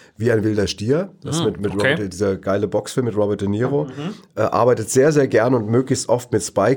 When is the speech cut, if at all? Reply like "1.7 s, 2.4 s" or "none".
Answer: none